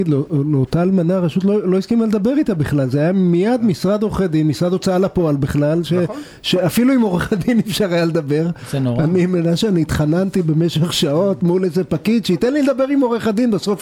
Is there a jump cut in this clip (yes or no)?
no